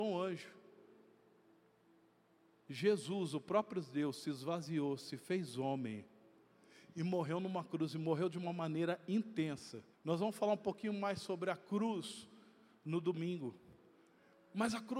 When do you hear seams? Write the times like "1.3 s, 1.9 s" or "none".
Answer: 9.9 s